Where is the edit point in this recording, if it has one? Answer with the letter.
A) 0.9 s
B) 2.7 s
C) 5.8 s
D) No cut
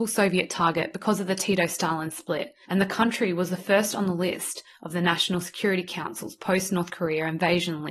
B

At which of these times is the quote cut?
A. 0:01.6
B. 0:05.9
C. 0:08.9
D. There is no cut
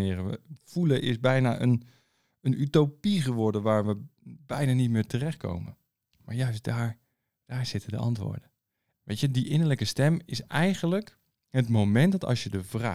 C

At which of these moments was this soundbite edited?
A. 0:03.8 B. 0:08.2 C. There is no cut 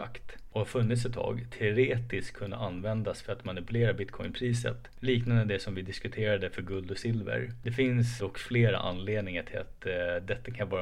B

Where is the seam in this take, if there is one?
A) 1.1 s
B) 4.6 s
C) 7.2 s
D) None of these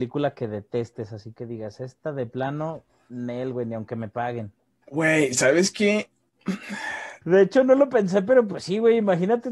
C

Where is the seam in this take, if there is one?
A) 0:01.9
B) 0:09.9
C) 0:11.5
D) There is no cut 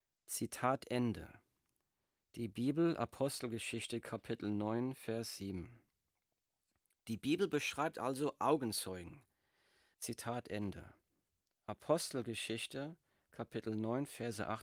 B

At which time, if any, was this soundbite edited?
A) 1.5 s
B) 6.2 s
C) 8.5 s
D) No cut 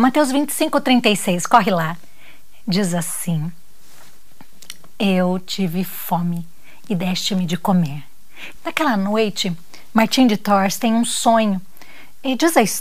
C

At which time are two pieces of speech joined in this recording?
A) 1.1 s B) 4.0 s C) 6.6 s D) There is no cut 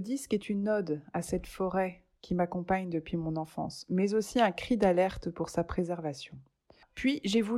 D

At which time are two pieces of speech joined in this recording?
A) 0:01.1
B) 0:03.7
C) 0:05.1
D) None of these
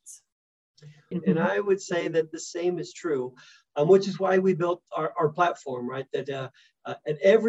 A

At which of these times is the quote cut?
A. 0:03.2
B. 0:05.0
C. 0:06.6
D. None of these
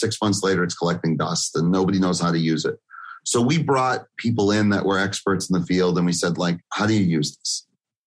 C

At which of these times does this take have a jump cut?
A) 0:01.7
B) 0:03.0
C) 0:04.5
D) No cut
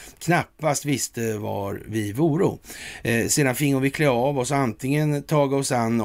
D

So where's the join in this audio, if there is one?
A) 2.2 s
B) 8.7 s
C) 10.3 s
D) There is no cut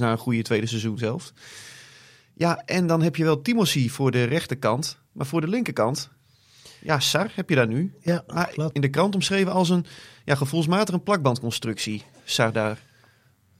B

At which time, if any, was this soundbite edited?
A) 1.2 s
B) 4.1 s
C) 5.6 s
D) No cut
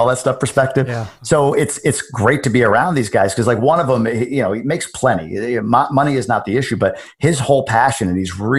D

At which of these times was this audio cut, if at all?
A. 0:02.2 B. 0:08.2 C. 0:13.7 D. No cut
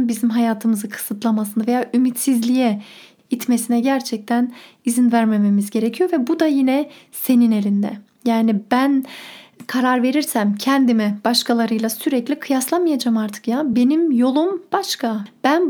D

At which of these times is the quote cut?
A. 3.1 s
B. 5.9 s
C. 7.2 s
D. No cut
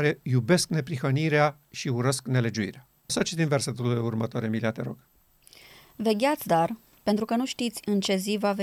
A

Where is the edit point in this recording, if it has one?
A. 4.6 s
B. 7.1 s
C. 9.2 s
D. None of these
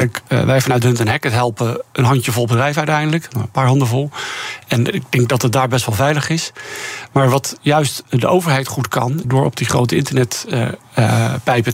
C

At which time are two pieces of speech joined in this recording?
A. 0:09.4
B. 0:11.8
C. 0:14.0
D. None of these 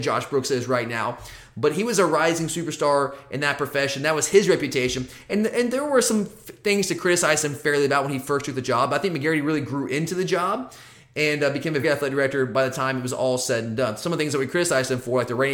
B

